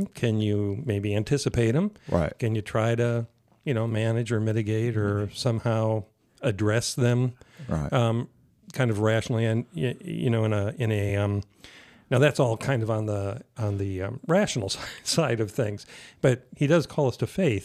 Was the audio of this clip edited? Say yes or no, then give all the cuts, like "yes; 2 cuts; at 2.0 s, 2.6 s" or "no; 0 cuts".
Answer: no; 0 cuts